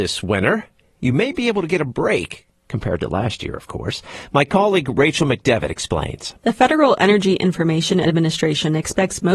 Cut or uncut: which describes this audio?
uncut